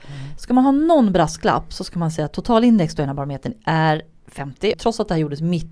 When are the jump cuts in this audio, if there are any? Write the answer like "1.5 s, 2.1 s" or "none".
4.7 s